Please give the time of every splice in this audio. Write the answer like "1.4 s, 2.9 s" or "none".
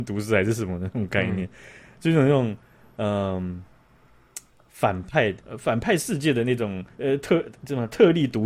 5.4 s, 6.9 s